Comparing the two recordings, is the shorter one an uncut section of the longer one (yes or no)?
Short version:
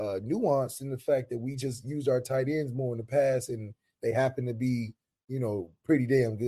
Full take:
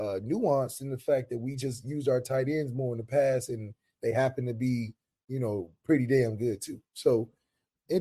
yes